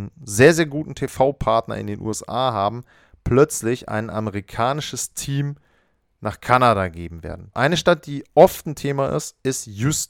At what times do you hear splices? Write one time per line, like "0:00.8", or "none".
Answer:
0:07.5